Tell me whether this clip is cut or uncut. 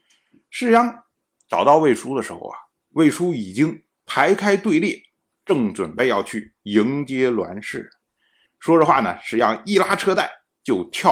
cut